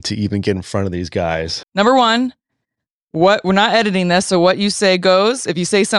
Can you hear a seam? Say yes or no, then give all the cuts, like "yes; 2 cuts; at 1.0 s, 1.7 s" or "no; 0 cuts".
yes; 1 cut; at 1.6 s